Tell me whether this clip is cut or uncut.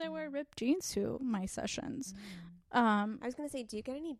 uncut